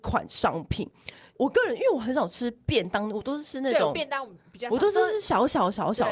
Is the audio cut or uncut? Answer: uncut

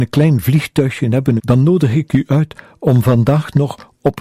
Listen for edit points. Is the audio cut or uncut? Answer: cut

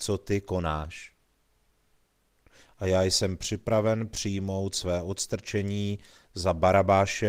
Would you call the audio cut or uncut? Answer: cut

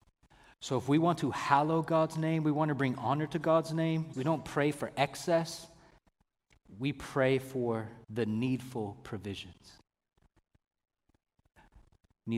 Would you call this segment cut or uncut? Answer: cut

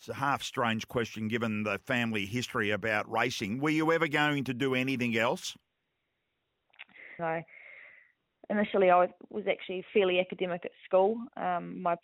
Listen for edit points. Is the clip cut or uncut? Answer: cut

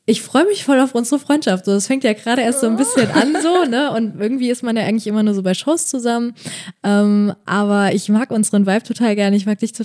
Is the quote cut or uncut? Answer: uncut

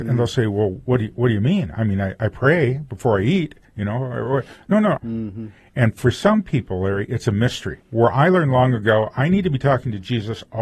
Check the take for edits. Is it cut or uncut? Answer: cut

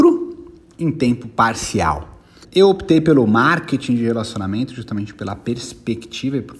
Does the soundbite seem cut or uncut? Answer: cut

